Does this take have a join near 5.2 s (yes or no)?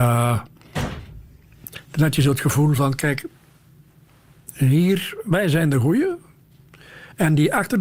yes